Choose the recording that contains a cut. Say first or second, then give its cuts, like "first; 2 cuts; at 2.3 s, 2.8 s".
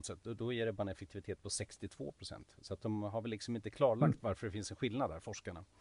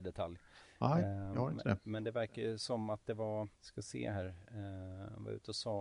second; 1 cut; at 3.5 s